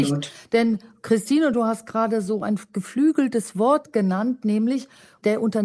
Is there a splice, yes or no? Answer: no